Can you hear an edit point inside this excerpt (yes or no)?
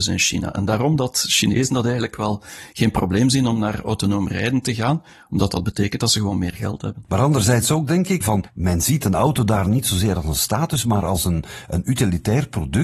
yes